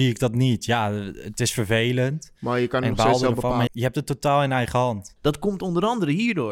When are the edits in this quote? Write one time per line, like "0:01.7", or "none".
0:03.7
0:05.2